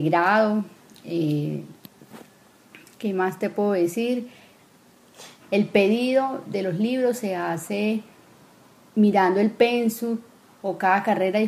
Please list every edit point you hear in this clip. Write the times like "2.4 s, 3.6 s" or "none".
5.4 s